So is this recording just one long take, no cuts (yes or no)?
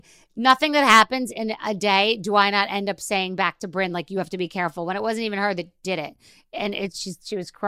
yes